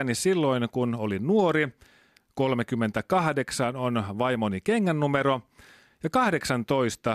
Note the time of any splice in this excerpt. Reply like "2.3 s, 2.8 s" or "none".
none